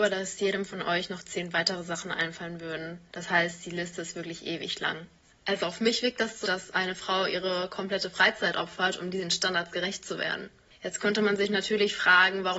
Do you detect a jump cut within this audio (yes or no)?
yes